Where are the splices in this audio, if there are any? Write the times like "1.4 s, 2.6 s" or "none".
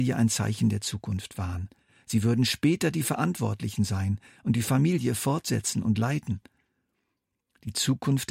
none